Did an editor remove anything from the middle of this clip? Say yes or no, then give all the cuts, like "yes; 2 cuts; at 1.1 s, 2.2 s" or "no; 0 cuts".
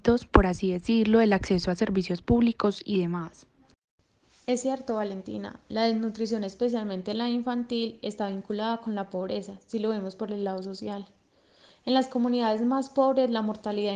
no; 0 cuts